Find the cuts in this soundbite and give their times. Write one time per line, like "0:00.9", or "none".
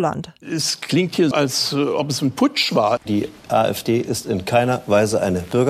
0:01.3
0:03.0